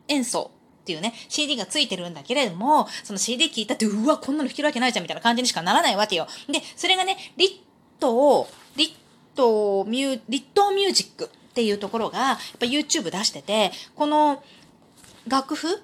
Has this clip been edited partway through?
no; 0 cuts

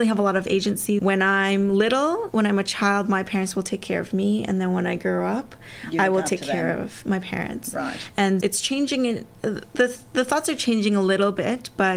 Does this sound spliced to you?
yes; 2 cuts; at 1.0 s, 8.4 s

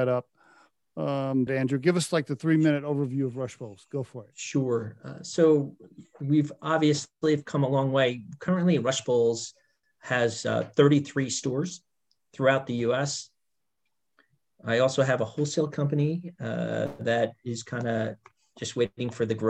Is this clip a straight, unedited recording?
no; 1 cut; at 1.5 s

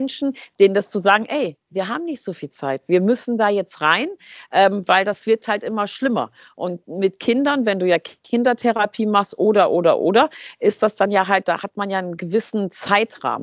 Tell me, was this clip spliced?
no; 0 cuts

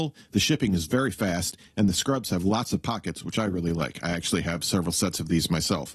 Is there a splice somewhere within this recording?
no; 0 cuts

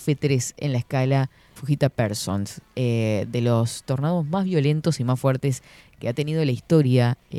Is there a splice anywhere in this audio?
yes; 1 cut; at 1.6 s

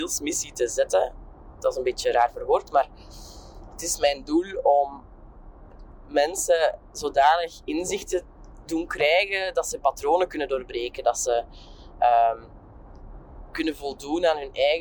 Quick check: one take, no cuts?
yes; 0 cuts

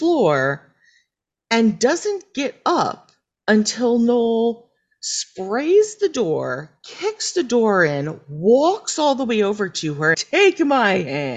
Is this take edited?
yes; 1 cut; at 10.1 s

